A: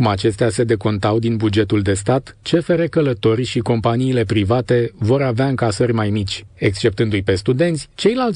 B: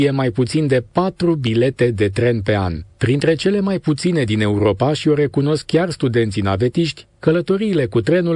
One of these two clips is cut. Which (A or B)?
A